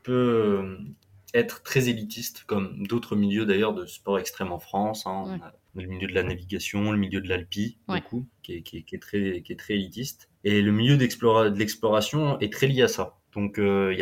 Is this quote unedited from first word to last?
no; 1 cut; at 10.4 s

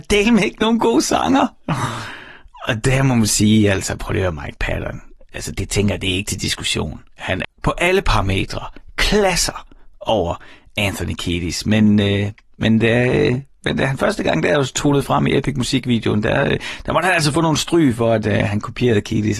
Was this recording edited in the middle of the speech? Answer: yes; 1 cut; at 7.4 s

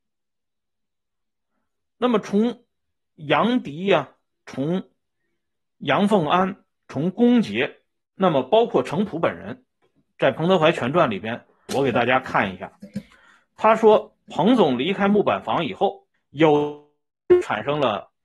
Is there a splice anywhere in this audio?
yes; 2 cuts; at 11.7 s, 16.1 s

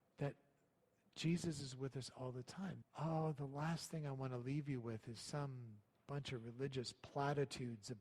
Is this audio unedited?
no; 1 cut; at 2.8 s

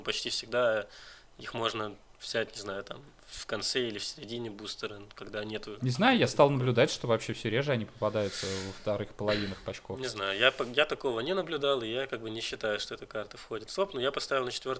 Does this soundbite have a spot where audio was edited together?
no; 0 cuts

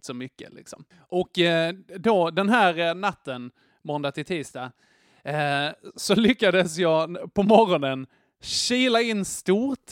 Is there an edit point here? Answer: no; 0 cuts

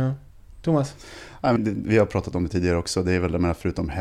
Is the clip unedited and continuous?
no; 1 cut; at 1.6 s

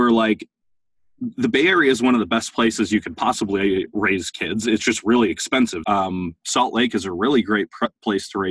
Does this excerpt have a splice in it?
yes; 1 cut; at 5.8 s

